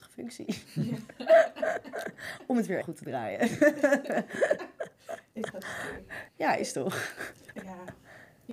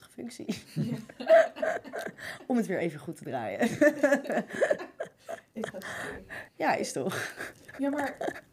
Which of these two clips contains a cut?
first; 2 cuts; at 2.8 s, 7.5 s

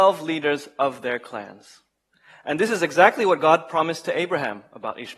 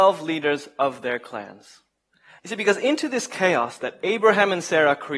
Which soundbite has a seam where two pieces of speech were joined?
second; 1 cut; at 2.4 s

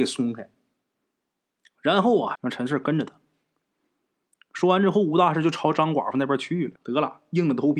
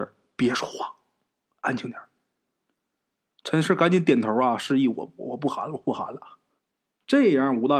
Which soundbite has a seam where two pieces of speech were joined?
first; 2 cuts; at 2.4 s, 6.8 s

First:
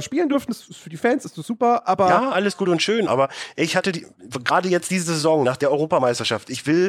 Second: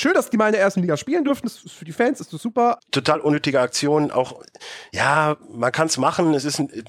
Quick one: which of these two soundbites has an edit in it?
second; 1 cut; at 2.8 s

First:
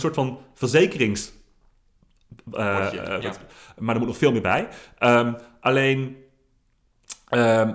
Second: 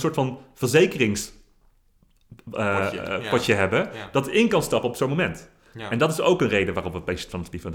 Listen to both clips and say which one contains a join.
first; 1 cut; at 3.2 s

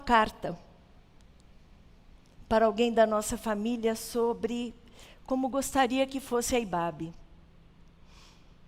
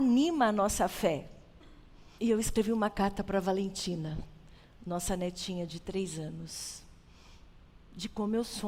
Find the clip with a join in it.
second; 1 cut; at 2.2 s

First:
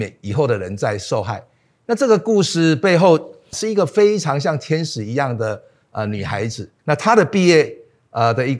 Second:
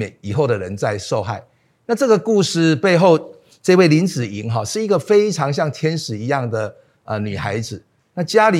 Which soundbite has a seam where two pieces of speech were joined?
first; 2 cuts; at 3.5 s, 6.8 s

